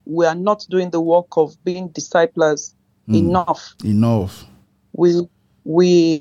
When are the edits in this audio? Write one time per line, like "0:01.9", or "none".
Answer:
none